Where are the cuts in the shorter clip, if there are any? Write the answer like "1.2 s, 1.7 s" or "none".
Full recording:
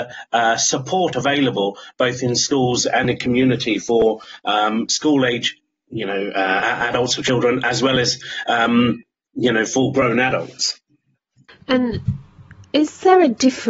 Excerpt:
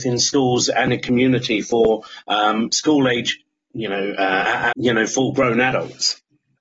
4.7 s